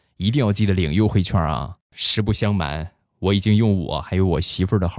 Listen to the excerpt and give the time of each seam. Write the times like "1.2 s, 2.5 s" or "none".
1.8 s